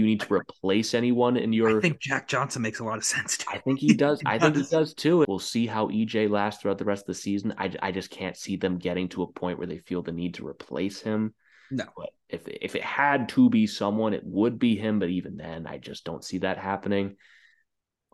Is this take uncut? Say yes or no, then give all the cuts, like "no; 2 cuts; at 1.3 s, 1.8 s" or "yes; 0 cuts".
no; 1 cut; at 5.2 s